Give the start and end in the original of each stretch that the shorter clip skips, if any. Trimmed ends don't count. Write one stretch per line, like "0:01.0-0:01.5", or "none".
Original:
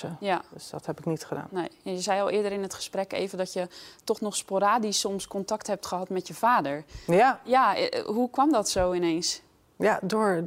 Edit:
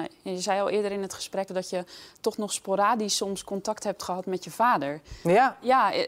0:03.1-0:03.3